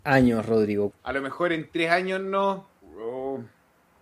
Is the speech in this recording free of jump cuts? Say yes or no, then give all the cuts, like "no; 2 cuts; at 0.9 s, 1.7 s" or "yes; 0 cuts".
no; 2 cuts; at 0.9 s, 2.8 s